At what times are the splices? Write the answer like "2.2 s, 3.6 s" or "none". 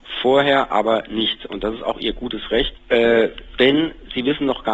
2.7 s